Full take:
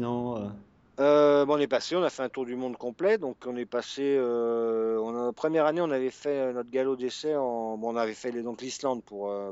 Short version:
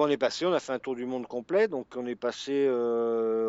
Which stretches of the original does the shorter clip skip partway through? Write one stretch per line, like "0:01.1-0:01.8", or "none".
none